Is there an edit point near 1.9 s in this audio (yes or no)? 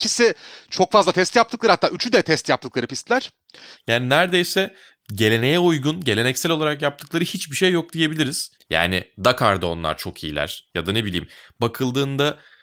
no